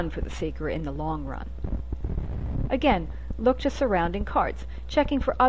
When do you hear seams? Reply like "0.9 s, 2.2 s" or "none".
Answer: 2.7 s